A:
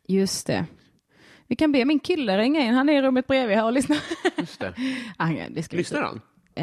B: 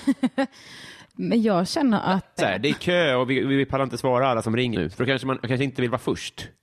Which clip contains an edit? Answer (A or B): B